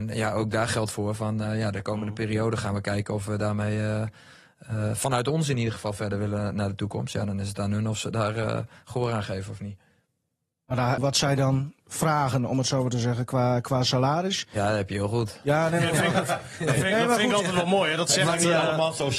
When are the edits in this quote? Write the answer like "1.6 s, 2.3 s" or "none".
11.0 s

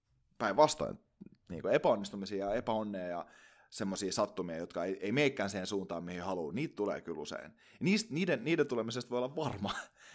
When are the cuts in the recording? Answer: none

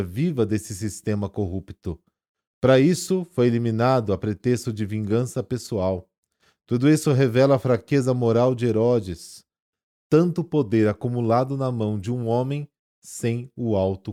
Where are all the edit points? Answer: none

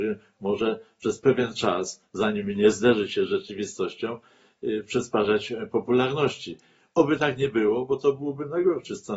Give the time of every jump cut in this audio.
none

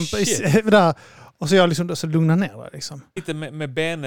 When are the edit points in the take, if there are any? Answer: 3.2 s

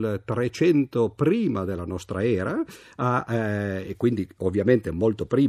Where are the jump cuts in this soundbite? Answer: none

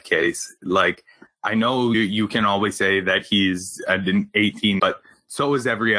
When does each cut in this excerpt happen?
1.9 s, 4.8 s

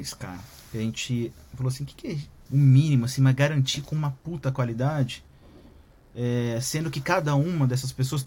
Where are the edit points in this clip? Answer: 2.5 s

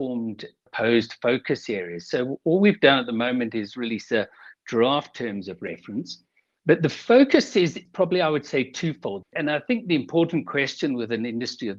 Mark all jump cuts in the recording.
6.6 s, 9.2 s

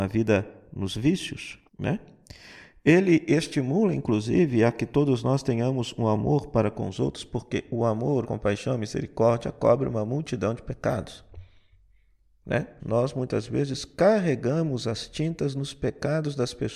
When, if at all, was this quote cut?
1.7 s, 8.2 s, 12.8 s

